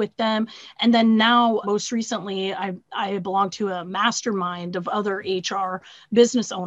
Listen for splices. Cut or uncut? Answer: cut